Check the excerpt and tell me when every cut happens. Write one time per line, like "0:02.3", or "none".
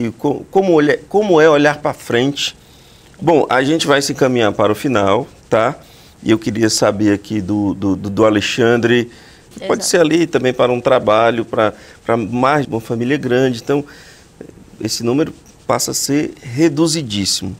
0:03.2
0:09.5
0:12.7